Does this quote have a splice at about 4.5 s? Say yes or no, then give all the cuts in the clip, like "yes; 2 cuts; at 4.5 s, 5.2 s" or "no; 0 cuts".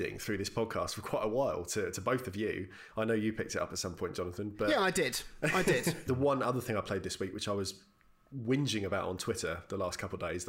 no; 1 cut; at 6.1 s